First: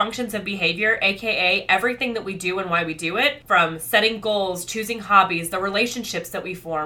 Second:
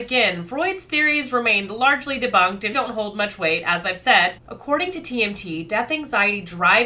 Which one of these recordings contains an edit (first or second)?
second